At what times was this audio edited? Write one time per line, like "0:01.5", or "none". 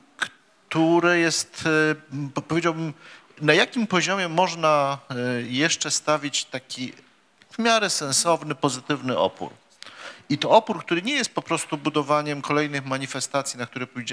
none